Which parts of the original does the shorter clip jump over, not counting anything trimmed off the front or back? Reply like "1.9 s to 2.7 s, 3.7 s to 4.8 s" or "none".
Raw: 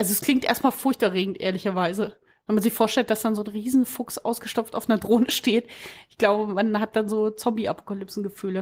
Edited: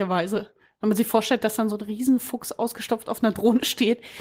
none